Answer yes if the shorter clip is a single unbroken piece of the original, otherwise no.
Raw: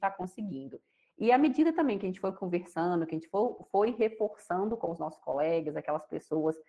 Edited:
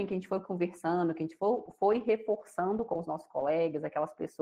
yes